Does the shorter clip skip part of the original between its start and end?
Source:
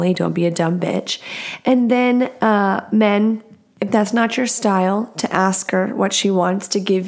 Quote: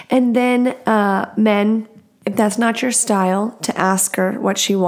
no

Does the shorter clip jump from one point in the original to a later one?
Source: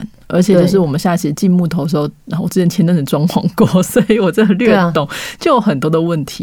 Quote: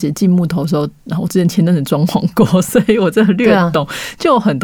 no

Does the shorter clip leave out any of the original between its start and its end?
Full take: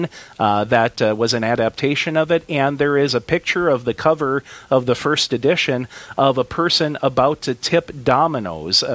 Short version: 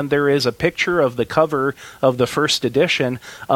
no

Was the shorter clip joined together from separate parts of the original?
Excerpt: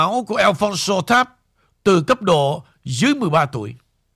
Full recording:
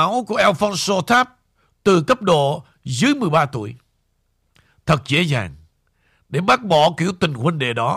no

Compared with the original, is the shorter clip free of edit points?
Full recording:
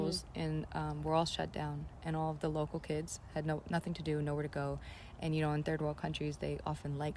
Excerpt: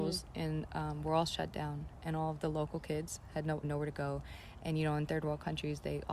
no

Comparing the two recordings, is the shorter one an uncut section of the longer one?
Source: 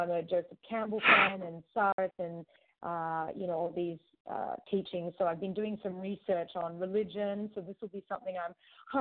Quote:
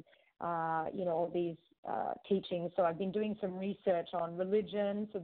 yes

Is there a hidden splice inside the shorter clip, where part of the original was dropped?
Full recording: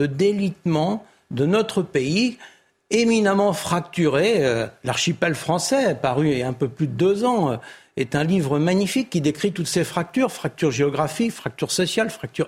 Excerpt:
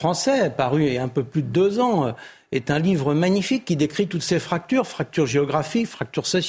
no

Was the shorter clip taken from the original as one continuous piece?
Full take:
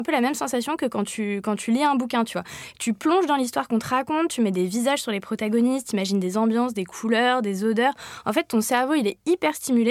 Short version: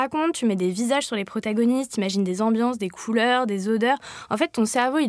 yes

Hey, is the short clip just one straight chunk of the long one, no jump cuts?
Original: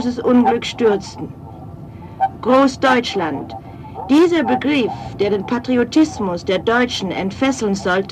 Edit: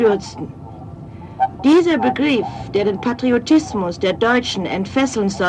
no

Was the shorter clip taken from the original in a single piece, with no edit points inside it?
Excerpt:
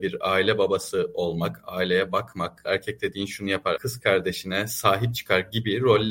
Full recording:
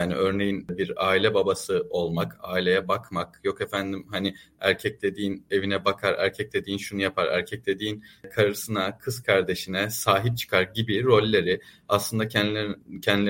no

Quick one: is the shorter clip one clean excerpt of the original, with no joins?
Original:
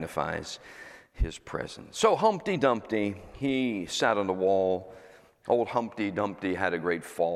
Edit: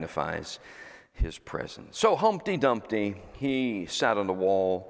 yes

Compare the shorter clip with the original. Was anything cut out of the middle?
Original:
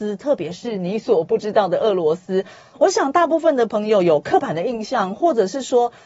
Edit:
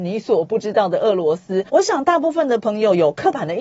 yes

